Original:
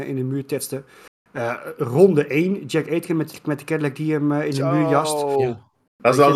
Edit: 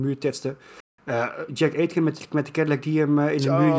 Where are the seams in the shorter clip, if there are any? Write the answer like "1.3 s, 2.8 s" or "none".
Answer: 1.5 s